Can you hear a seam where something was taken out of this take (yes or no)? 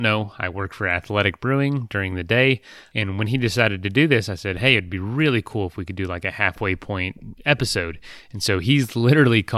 yes